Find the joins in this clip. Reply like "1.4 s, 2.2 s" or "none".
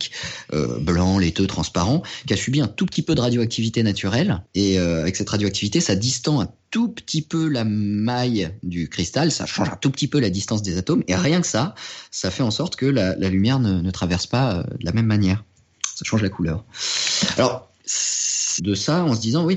4.5 s, 18.6 s